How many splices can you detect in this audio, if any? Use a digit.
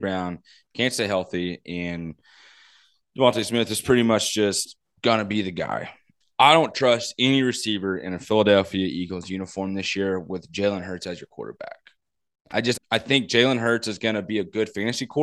1